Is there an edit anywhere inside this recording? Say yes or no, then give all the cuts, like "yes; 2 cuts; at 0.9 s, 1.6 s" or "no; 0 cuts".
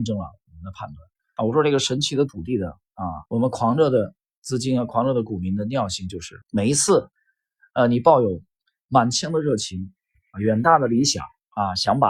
yes; 3 cuts; at 1.4 s, 3.3 s, 6.4 s